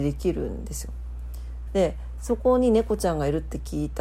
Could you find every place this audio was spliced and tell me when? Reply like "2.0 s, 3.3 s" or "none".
1.7 s